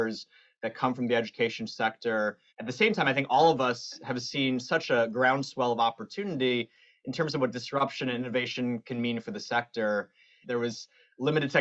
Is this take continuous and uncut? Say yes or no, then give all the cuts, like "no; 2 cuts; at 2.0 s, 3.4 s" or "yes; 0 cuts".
no; 2 cuts; at 2.5 s, 10.4 s